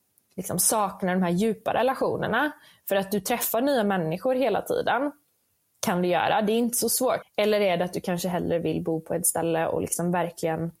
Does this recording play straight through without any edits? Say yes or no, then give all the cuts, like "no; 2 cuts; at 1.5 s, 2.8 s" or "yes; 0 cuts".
no; 1 cut; at 7.2 s